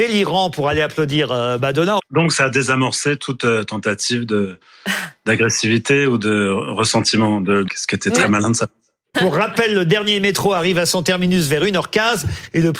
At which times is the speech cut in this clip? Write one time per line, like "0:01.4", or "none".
0:02.0
0:07.7
0:09.1